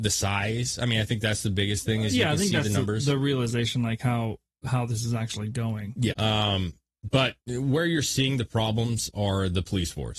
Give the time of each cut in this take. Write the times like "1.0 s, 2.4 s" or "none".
6.1 s, 7.4 s